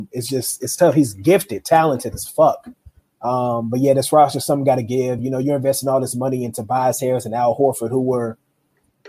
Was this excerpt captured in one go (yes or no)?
yes